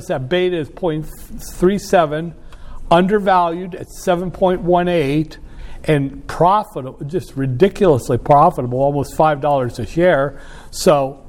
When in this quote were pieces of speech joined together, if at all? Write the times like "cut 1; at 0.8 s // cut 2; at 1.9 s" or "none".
none